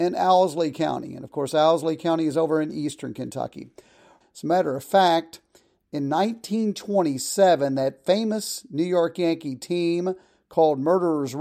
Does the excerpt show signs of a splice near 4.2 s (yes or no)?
yes